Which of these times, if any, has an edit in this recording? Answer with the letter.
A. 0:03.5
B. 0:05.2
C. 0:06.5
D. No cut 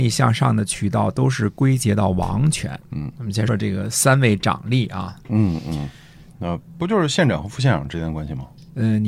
A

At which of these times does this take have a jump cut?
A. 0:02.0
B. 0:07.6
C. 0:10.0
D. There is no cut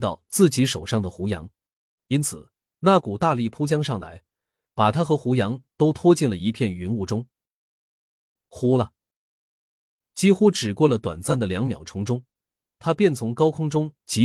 A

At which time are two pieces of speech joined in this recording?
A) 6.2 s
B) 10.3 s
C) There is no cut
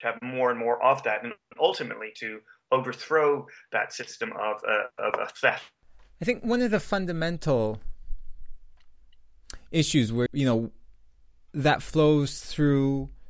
B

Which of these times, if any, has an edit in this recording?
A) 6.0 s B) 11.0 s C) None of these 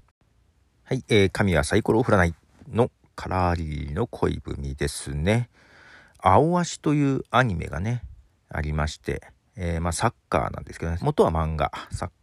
B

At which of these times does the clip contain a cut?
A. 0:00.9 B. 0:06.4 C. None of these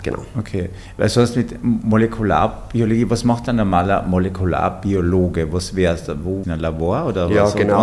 B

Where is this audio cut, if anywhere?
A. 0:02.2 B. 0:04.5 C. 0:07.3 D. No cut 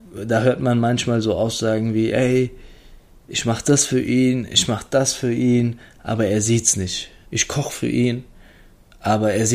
C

